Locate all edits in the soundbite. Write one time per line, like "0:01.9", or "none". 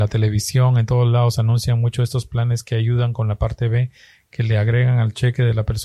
none